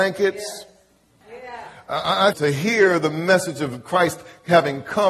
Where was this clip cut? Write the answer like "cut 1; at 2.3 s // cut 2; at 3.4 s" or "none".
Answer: cut 1; at 1.2 s // cut 2; at 2.3 s